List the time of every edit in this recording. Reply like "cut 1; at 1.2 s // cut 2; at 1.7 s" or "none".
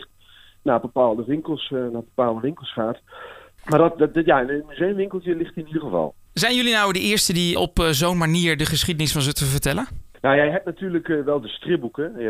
cut 1; at 7.6 s